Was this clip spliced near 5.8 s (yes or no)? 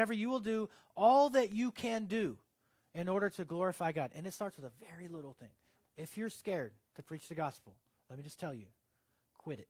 yes